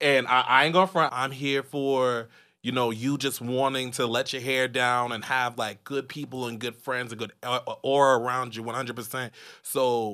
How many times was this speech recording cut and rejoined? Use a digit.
1